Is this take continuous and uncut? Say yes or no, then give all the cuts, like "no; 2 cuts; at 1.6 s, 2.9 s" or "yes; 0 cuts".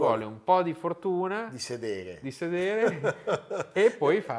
yes; 0 cuts